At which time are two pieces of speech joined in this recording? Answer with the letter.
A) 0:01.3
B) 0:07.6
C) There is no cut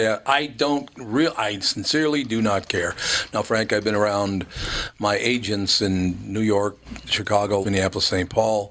B